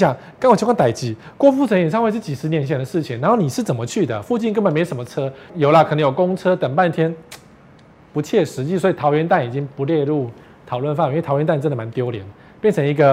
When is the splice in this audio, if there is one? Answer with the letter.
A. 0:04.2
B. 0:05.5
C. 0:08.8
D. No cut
B